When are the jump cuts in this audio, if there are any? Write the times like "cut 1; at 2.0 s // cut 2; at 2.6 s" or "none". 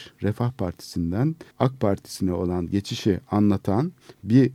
cut 1; at 1.5 s